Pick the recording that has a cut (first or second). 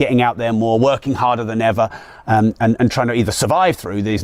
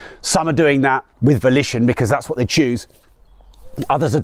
second